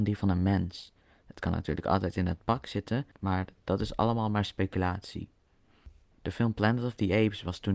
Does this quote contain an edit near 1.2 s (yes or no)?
no